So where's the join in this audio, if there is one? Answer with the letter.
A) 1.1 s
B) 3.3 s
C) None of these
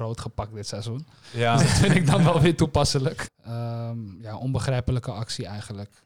B